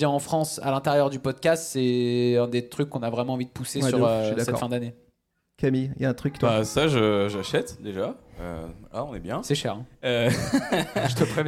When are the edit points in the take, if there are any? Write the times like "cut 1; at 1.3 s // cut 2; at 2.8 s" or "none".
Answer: none